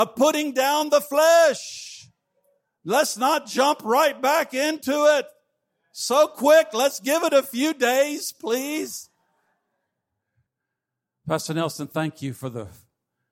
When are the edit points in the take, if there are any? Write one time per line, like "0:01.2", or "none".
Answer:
none